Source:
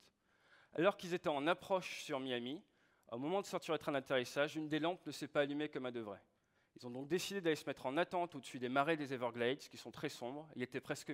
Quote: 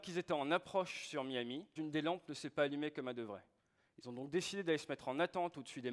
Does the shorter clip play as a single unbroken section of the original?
no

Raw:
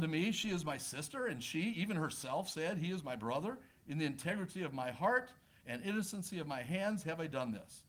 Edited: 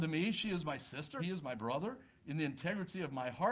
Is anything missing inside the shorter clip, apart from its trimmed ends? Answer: yes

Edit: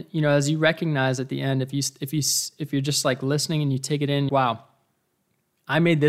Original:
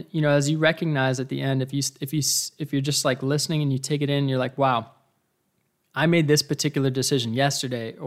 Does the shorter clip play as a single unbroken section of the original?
no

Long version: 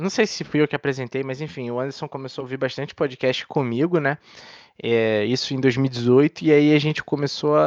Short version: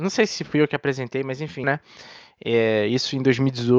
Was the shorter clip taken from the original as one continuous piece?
no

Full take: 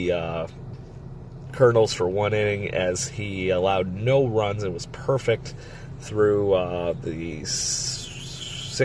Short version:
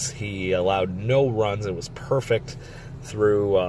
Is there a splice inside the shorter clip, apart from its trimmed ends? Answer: no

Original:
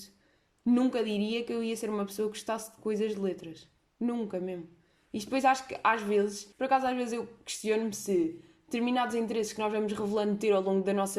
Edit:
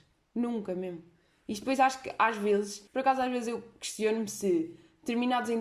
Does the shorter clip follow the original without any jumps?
yes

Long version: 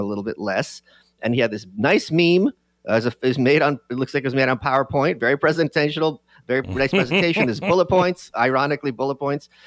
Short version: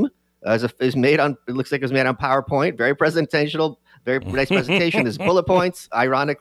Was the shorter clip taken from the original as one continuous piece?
yes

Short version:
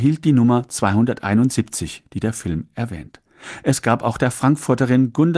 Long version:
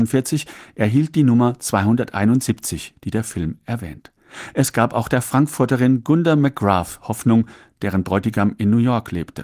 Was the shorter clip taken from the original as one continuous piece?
yes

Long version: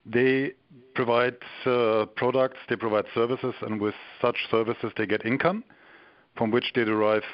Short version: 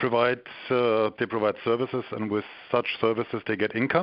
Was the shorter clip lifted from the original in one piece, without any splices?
no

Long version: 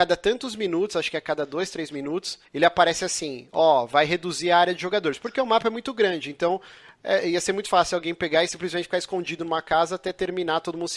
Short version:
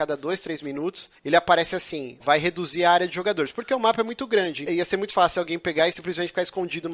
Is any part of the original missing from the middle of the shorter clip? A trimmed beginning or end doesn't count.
yes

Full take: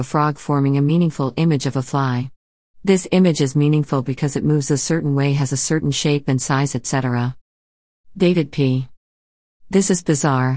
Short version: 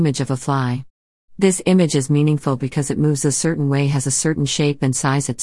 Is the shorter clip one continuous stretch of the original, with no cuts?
yes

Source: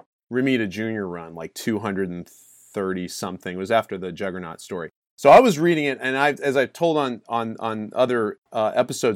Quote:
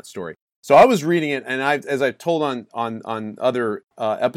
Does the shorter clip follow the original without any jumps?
yes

